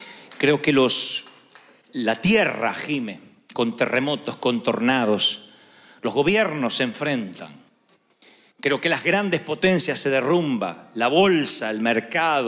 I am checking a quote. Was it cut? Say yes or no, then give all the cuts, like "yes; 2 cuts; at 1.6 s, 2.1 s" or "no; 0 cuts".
no; 0 cuts